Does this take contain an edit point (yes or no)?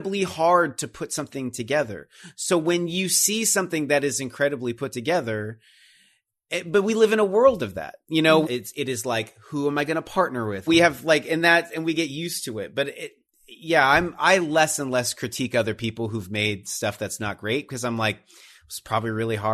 yes